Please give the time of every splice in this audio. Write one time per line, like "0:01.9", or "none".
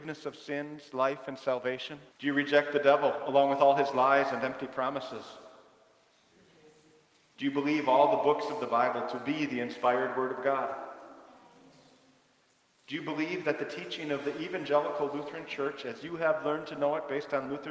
0:02.1
0:07.3